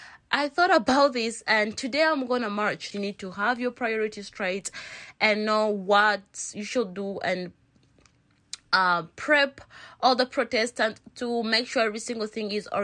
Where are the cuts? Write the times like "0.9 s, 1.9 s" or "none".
2.9 s